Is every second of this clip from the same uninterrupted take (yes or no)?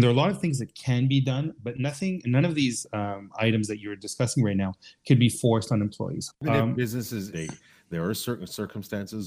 no